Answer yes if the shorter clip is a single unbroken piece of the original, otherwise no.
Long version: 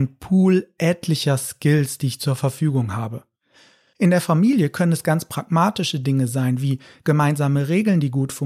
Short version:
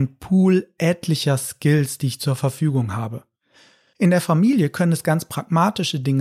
yes